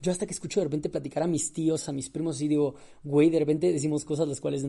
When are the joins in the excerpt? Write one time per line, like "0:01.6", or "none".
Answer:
none